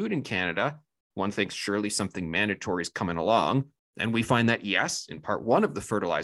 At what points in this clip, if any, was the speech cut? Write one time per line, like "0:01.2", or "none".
0:01.1